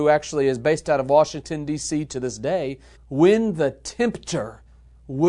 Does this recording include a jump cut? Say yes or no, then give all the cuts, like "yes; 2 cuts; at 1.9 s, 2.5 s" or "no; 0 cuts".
yes; 1 cut; at 3.0 s